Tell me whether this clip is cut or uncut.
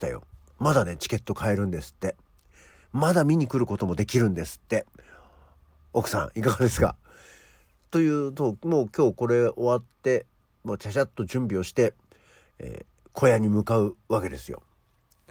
uncut